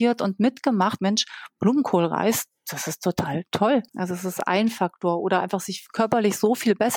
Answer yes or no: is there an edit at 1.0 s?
yes